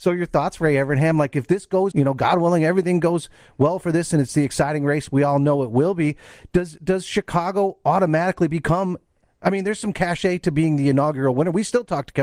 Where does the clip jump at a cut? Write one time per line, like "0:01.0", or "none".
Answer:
0:01.9